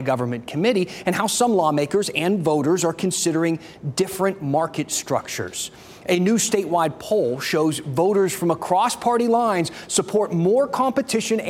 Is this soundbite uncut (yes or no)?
yes